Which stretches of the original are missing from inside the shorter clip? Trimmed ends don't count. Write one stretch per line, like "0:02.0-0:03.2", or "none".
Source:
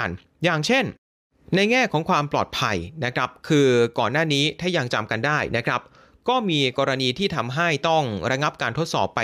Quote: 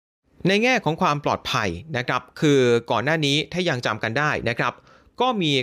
none